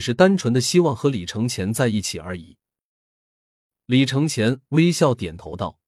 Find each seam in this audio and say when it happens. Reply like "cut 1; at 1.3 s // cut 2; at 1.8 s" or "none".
none